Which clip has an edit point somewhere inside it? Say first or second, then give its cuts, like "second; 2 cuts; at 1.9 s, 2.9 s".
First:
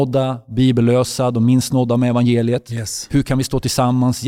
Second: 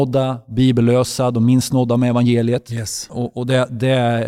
second; 1 cut; at 3.1 s